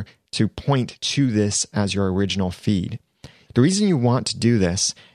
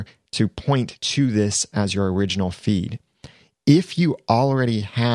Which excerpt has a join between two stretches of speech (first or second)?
first